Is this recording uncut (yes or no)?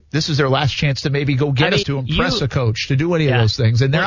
no